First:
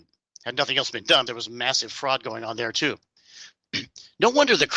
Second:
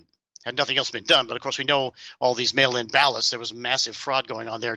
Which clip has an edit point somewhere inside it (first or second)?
first